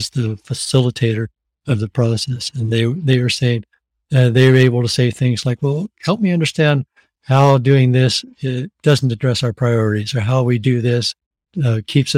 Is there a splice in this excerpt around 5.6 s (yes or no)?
no